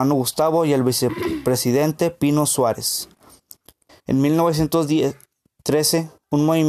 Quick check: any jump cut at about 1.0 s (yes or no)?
no